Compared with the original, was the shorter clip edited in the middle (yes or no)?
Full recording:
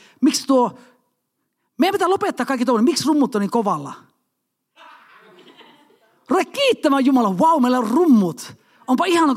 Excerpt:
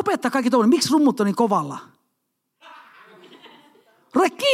no